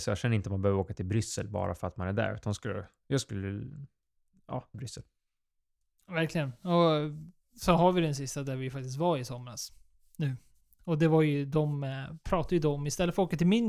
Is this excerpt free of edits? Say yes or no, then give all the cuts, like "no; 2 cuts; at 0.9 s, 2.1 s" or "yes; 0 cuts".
no; 1 cut; at 4.7 s